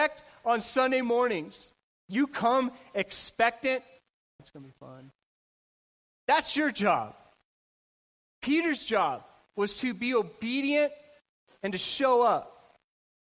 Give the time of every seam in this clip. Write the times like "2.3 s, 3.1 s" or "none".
4.4 s